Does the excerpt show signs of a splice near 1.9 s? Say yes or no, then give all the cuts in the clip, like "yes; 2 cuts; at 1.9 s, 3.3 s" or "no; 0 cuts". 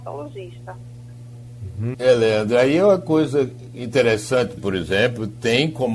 yes; 2 cuts; at 1.9 s, 4.6 s